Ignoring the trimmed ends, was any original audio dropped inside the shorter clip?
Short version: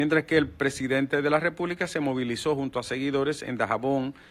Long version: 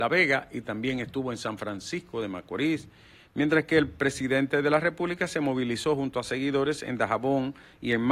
no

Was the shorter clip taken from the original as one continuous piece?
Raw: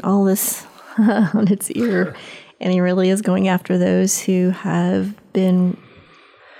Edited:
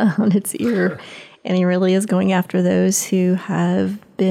yes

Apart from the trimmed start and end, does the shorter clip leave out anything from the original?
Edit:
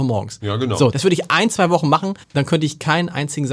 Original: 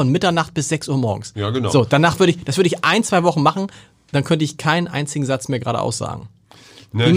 yes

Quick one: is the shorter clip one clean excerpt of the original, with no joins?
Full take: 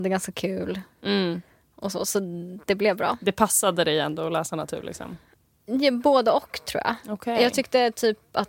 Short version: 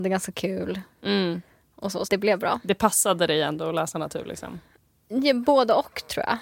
no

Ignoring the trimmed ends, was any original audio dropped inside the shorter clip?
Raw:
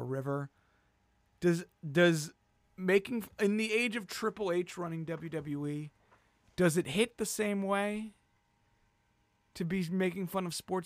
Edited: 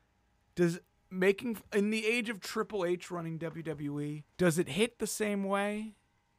yes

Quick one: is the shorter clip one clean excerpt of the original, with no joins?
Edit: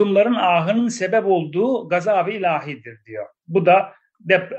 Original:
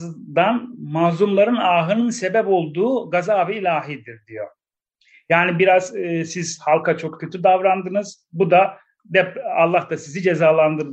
no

